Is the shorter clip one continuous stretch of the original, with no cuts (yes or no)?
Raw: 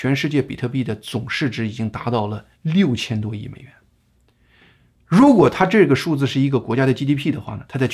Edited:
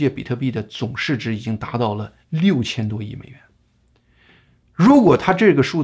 yes